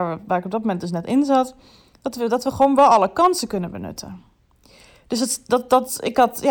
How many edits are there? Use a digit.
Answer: 0